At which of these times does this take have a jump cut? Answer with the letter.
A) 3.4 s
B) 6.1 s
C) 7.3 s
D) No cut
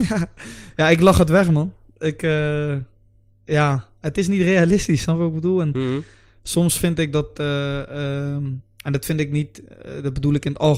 D